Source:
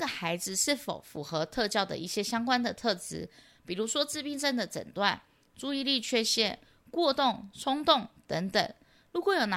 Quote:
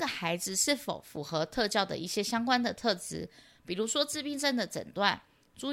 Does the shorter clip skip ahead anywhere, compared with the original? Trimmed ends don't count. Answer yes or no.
no